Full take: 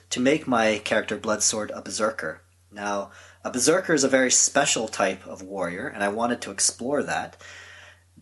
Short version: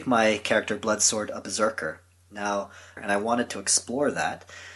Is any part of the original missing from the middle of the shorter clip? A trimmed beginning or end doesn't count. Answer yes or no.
yes